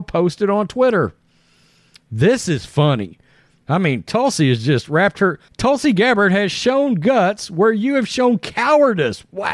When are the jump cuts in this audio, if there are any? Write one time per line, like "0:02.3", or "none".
0:03.6
0:05.5